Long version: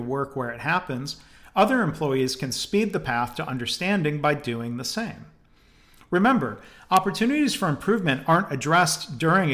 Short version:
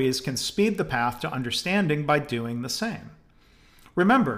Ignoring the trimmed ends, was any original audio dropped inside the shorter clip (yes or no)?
no